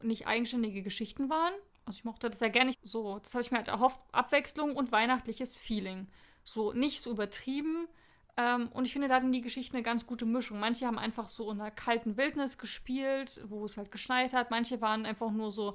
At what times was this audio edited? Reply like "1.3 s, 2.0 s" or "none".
1.7 s, 2.7 s